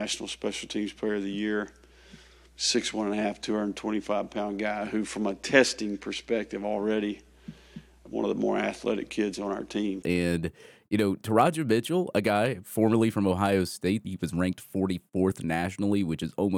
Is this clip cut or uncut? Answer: cut